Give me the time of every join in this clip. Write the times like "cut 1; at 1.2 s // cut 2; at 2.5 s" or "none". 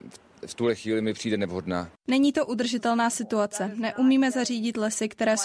cut 1; at 2.0 s